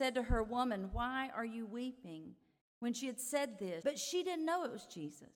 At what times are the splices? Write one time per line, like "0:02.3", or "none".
0:02.6
0:03.8